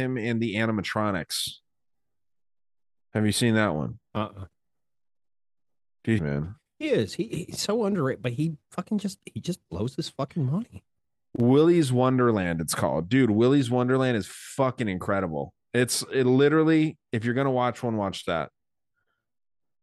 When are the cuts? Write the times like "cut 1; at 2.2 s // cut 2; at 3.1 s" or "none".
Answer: cut 1; at 6.2 s